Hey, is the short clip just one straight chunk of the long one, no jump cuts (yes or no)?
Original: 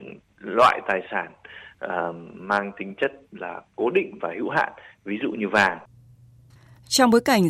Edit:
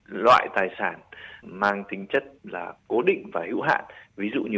no